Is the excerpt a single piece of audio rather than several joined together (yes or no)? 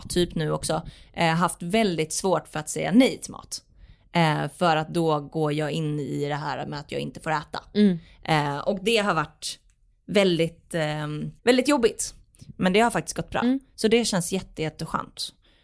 no